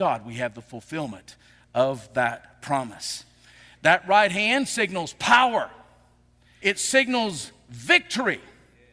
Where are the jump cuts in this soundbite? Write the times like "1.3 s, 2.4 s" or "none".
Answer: 6.6 s